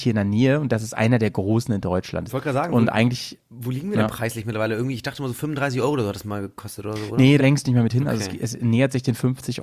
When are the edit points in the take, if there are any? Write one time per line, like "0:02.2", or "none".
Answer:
0:02.3
0:07.4